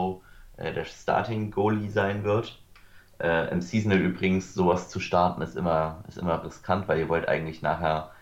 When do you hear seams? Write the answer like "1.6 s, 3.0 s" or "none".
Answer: none